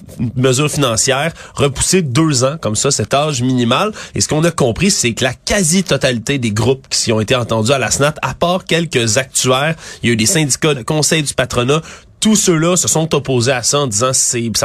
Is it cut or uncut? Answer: cut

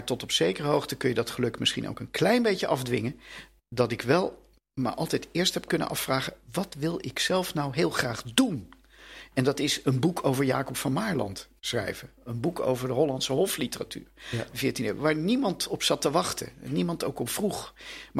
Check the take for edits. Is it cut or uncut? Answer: uncut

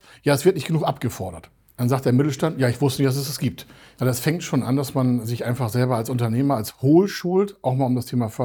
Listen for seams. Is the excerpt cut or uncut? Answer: cut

